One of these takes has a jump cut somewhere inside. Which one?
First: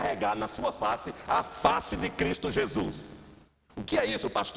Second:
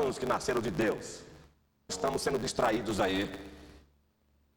second; 1 cut; at 1.9 s

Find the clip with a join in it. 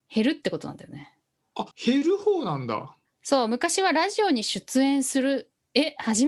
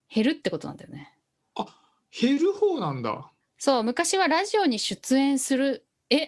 first; 1 cut; at 1.7 s

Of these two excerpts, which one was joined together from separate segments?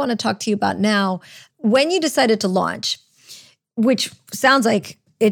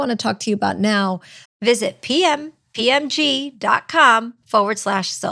second; 1 cut; at 1.5 s

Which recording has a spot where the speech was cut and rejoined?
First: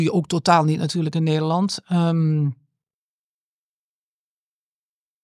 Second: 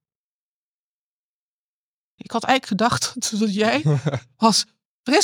second; 1 cut; at 2.2 s

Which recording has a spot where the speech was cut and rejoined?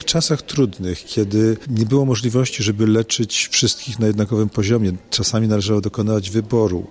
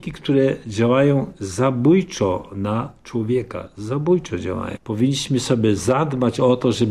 second; 1 cut; at 4.8 s

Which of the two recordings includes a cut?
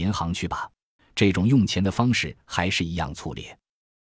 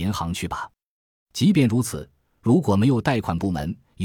first; 1 cut; at 1.0 s

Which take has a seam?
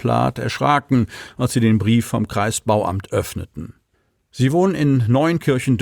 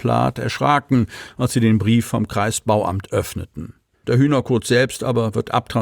second; 1 cut; at 4.0 s

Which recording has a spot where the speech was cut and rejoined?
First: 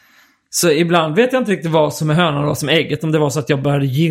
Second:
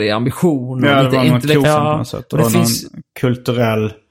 second; 1 cut; at 1.6 s

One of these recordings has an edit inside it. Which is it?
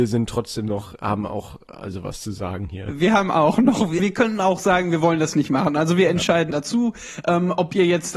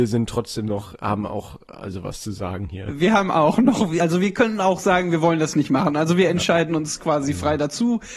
first; 2 cuts; at 4.0 s, 6.5 s

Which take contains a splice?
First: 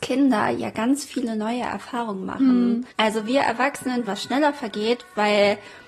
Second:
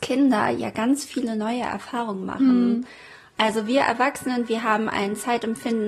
first; 2 cuts; at 2.9 s, 4.1 s

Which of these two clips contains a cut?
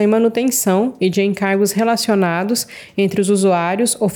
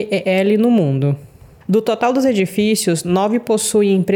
second; 1 cut; at 1.6 s

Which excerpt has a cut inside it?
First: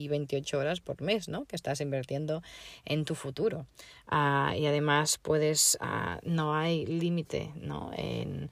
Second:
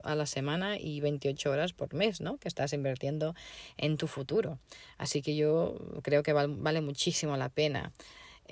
first; 1 cut; at 4.0 s

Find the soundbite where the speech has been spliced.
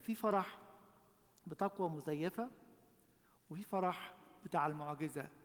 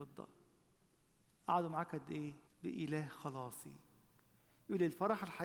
second; 1 cut; at 2.5 s

